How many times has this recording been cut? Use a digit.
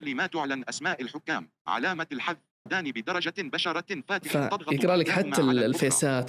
1